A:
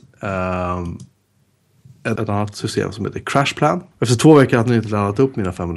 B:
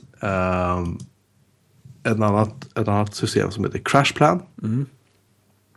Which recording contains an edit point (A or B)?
A